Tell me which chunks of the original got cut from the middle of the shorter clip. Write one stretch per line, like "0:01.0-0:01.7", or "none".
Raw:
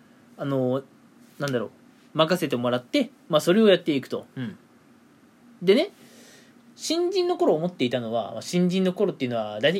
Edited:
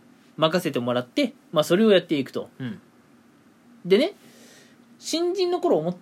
none